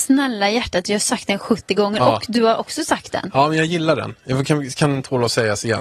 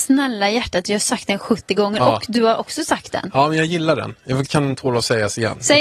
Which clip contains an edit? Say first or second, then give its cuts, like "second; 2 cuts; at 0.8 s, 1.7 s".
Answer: second; 1 cut; at 4.5 s